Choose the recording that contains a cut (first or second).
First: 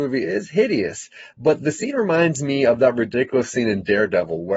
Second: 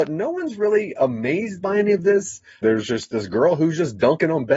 second